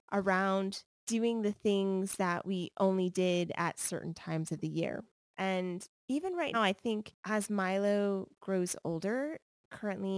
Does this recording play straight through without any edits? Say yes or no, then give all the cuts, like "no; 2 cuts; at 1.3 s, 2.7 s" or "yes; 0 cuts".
no; 2 cuts; at 5.2 s, 6.5 s